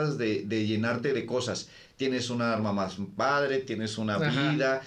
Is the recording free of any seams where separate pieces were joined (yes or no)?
yes